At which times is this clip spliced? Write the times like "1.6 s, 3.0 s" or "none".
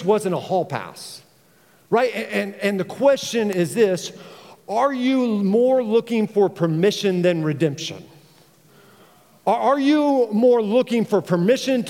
none